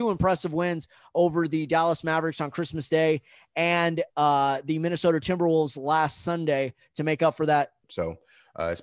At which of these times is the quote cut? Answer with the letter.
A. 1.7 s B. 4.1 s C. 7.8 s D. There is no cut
C